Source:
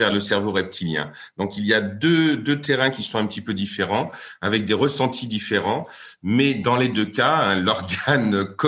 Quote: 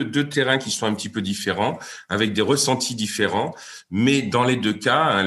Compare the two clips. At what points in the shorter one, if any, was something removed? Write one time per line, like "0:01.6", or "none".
none